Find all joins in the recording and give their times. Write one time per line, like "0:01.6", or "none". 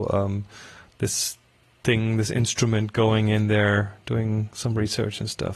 none